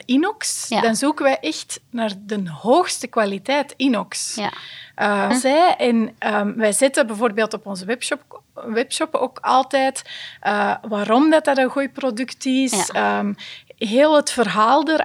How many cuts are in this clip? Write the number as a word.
one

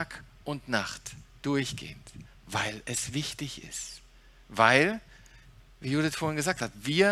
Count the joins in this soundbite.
one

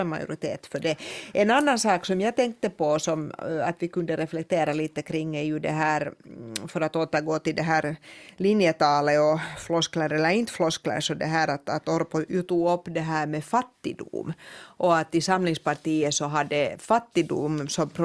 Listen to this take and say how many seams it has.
zero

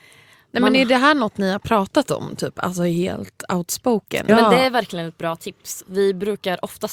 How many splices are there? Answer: one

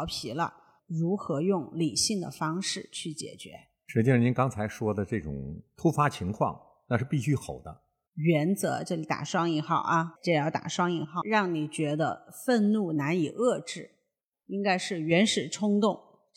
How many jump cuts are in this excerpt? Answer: two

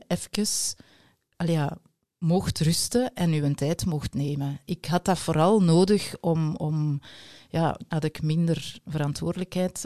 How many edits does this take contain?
one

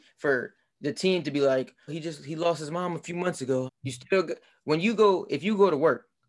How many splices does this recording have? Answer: two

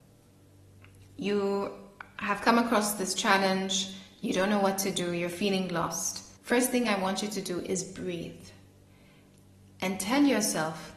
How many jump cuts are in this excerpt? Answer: one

